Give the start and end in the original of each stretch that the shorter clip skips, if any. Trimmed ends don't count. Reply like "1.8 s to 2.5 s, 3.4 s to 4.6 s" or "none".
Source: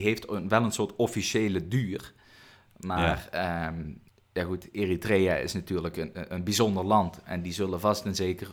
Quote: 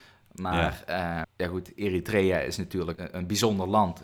3.7 s to 4.2 s, 5.9 s to 6.1 s